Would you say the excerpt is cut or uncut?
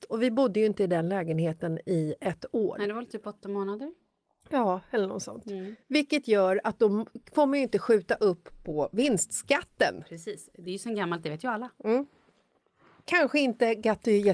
uncut